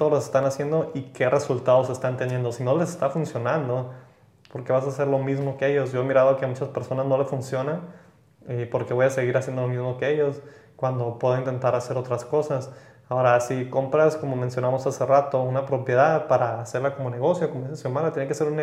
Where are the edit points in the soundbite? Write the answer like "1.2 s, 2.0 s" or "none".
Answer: none